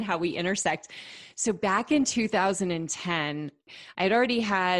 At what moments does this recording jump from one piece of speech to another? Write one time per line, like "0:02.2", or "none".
none